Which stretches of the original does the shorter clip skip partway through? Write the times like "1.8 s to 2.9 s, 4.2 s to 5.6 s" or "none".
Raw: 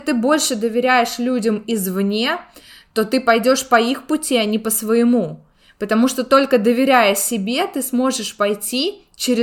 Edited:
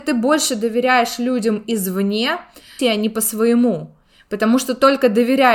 2.8 s to 4.3 s